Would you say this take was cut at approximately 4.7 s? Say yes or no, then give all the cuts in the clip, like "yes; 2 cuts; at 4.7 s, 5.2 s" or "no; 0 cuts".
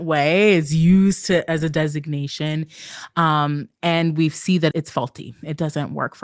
yes; 1 cut; at 4.7 s